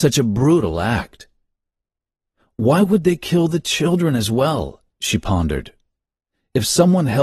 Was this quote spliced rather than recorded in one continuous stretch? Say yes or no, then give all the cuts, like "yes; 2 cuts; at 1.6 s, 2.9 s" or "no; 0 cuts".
no; 0 cuts